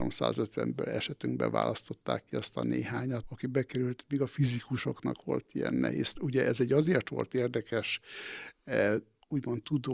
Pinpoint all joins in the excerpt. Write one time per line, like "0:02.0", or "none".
0:03.2
0:06.2